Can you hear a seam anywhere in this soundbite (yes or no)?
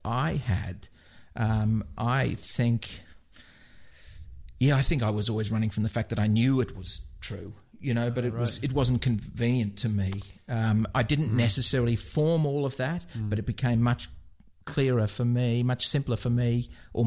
no